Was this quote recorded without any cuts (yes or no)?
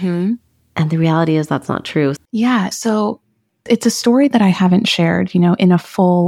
no